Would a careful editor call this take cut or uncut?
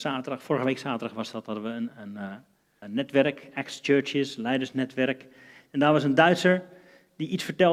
cut